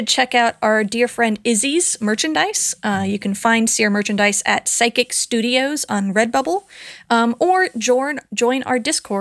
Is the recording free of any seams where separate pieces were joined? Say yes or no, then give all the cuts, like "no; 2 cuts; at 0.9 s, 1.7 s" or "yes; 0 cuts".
yes; 0 cuts